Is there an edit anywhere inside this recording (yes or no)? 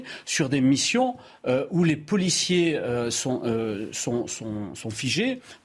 no